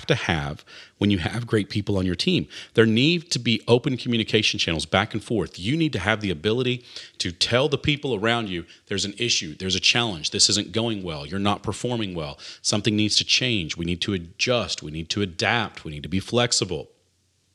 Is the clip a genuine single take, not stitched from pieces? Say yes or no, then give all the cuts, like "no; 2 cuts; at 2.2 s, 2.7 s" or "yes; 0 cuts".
yes; 0 cuts